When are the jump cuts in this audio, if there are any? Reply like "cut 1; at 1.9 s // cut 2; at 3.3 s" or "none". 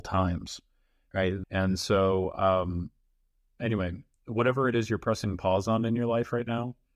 cut 1; at 1.4 s